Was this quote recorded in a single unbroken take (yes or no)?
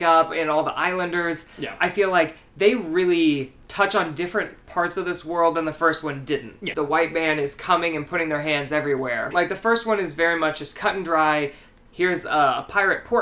no